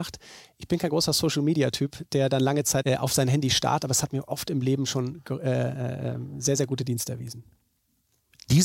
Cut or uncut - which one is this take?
cut